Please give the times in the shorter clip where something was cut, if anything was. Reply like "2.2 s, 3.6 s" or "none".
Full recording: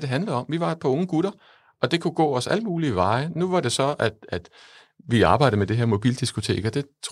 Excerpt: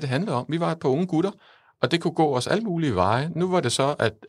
none